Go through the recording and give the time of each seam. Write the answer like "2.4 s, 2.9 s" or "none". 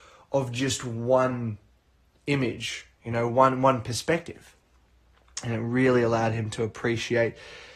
none